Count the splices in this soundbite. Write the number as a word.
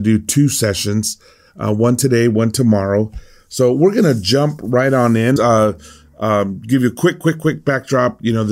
one